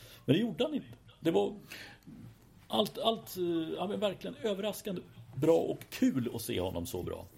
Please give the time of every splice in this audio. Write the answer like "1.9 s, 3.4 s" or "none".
none